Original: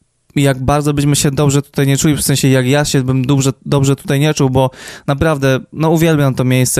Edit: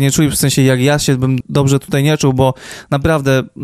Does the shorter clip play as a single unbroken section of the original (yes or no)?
no